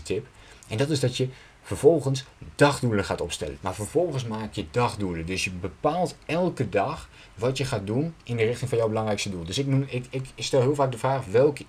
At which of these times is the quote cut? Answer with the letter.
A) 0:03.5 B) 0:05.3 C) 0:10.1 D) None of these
A